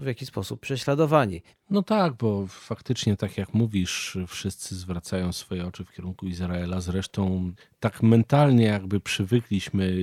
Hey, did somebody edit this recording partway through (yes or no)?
yes